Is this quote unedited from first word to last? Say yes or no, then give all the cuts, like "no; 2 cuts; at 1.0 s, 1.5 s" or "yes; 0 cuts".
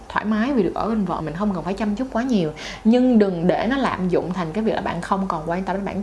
no; 1 cut; at 1.2 s